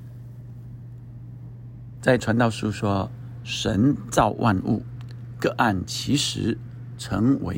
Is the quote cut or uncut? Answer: cut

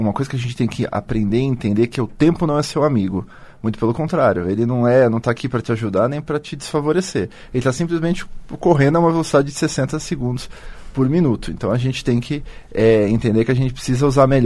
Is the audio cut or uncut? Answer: uncut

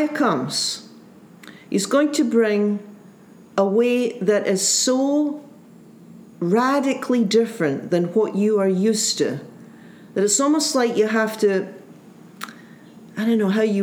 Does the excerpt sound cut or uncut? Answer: uncut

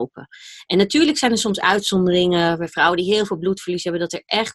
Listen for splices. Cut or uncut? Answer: uncut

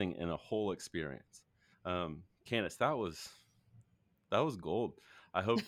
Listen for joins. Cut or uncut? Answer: cut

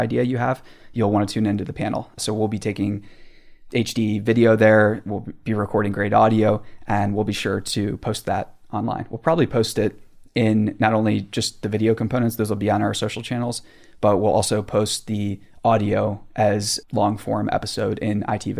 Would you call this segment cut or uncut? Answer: uncut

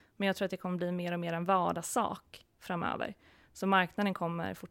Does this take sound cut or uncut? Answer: uncut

